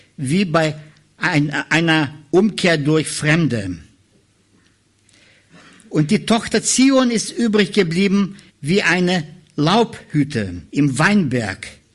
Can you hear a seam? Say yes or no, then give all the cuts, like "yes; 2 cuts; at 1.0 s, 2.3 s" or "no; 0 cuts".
yes; 2 cuts; at 8.5 s, 10.7 s